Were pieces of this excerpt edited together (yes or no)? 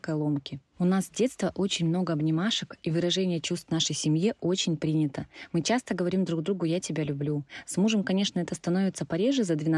no